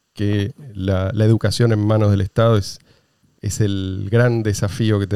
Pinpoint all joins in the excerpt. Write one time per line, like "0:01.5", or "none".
none